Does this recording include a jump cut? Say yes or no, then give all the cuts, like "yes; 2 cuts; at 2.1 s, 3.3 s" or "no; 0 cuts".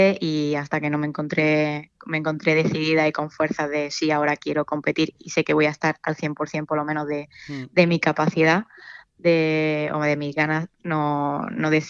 no; 0 cuts